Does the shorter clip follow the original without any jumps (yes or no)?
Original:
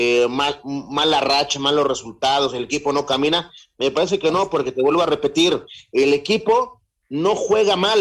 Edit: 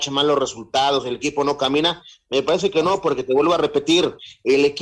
yes